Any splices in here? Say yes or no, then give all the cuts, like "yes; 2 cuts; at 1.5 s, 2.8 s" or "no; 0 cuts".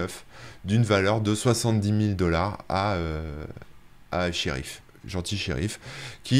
no; 0 cuts